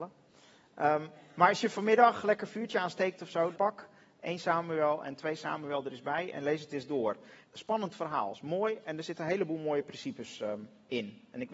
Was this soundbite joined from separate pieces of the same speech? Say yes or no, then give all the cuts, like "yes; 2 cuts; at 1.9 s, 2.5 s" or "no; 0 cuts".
yes; 2 cuts; at 3.5 s, 7.4 s